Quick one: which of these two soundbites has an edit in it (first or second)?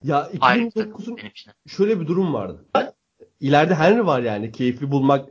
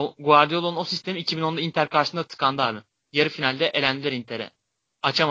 first